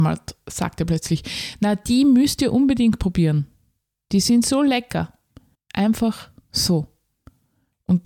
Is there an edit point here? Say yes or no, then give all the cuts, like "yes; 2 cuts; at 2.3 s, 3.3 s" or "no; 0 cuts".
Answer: yes; 1 cut; at 5.5 s